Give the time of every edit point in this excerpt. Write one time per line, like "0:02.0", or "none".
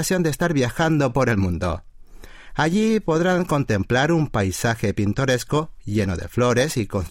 none